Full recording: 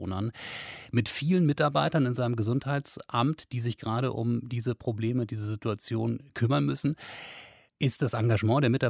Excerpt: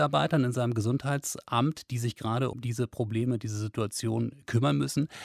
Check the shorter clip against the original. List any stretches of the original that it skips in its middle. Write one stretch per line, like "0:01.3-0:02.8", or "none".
0:04.1-0:04.4